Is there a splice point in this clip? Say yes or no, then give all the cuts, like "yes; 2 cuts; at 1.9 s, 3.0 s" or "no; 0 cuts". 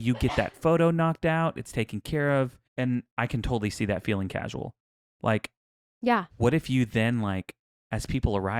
yes; 2 cuts; at 2.7 s, 6.3 s